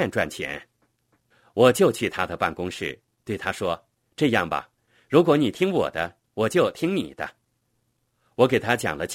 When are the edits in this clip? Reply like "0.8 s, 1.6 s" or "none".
none